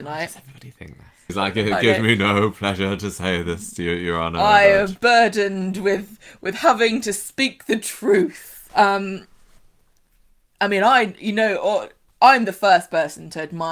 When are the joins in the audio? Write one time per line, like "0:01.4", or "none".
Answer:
0:01.3
0:08.7